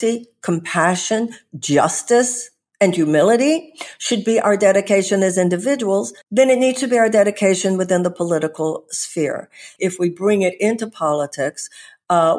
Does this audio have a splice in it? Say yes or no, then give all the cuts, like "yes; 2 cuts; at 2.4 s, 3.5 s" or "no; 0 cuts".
yes; 2 cuts; at 6.2 s, 9.8 s